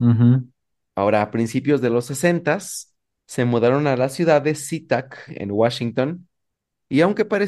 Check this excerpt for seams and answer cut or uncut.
cut